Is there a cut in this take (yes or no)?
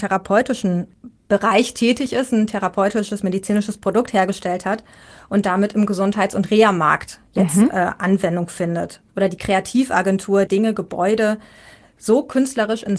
yes